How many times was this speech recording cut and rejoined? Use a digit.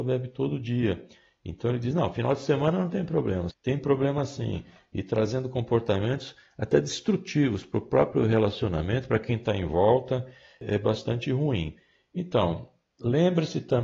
1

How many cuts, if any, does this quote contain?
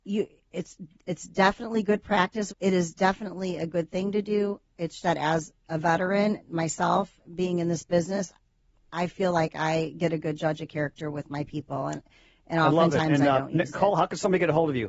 2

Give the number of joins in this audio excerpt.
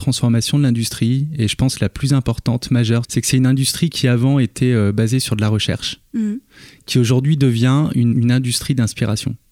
2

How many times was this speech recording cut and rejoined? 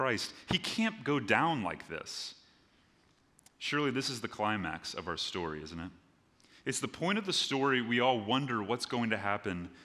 0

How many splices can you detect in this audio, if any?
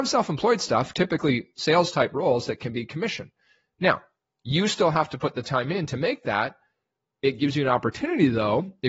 0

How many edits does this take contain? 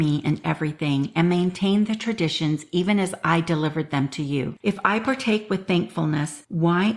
1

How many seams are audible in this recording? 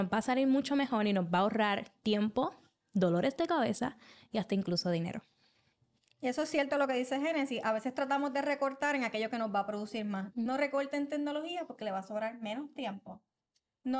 1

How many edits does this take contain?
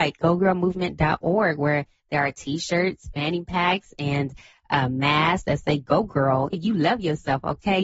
1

